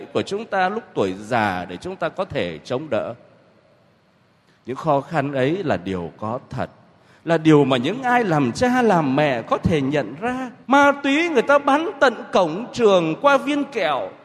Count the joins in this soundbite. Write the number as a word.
one